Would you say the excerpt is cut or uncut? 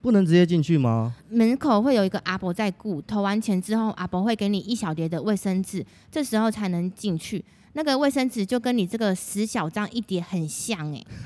cut